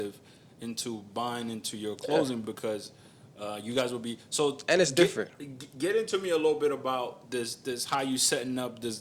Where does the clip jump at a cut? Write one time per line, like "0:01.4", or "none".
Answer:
none